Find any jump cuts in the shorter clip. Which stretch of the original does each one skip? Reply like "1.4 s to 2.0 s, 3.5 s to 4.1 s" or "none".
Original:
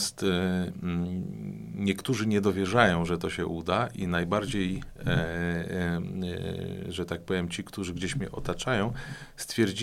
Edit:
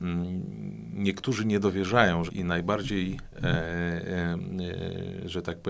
3.1 s to 3.9 s